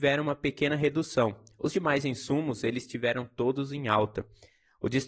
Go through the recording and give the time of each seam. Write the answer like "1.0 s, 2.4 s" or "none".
none